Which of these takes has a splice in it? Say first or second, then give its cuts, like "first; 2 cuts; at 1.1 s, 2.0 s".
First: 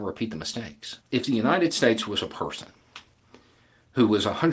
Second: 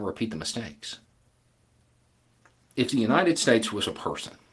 first; 1 cut; at 1.0 s